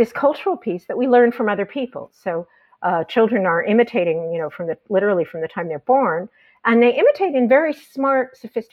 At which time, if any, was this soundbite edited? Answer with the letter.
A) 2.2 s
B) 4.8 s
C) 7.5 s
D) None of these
D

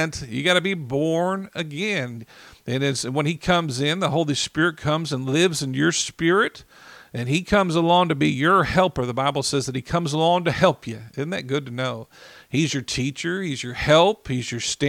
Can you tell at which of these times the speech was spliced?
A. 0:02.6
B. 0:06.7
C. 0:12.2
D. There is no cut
D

